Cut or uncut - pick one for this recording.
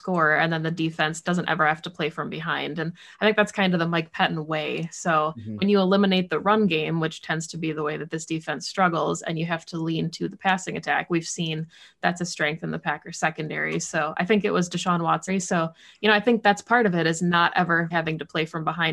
cut